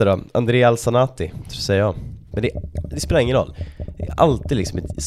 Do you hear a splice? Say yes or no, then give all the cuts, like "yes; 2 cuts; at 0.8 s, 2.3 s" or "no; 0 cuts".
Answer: yes; 1 cut; at 2.3 s